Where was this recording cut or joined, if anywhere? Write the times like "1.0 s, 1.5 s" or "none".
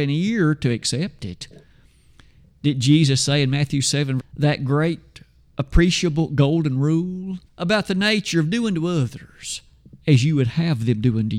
4.2 s, 7.5 s